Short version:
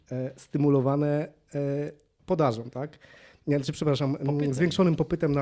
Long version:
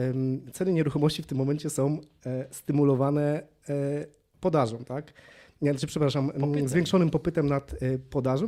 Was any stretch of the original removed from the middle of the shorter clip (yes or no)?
no